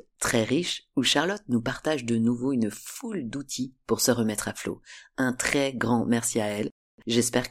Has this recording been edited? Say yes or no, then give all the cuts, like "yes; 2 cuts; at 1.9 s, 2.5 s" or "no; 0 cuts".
no; 0 cuts